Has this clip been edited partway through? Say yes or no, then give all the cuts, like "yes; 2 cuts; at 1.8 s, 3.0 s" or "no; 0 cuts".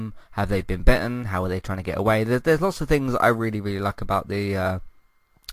no; 0 cuts